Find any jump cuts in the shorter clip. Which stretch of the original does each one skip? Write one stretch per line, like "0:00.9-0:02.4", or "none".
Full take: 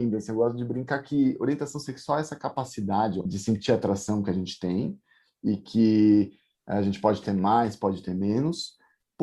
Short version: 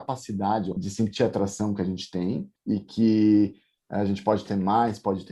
0:05.0-0:05.3